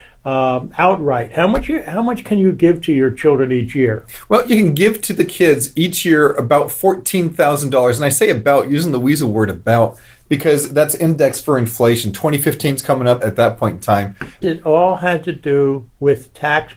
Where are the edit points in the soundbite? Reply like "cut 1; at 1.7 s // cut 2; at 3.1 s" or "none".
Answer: cut 1; at 13.2 s // cut 2; at 14.4 s